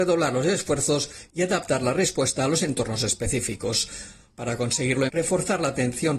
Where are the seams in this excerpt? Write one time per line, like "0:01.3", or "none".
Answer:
0:05.1

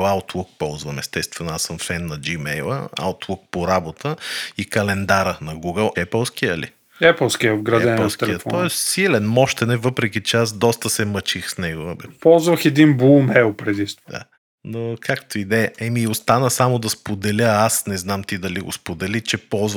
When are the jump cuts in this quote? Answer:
0:05.9
0:14.1

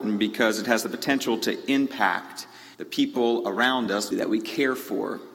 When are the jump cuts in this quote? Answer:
0:02.7
0:04.1

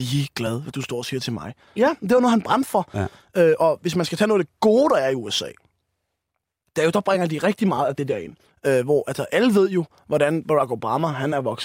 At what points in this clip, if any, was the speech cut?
0:01.8
0:08.5

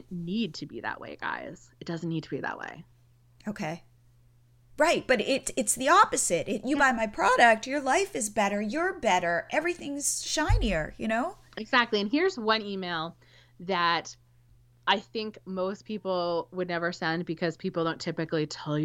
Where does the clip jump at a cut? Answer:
none

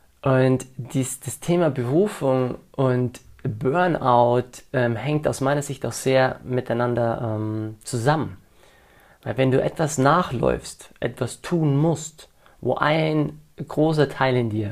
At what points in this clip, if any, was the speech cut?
none

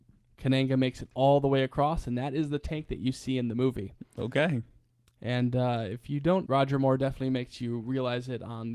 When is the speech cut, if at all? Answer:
0:06.5

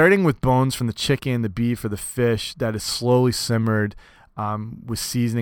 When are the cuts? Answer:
none

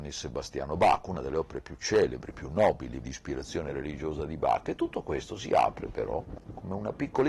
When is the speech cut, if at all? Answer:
0:03.0

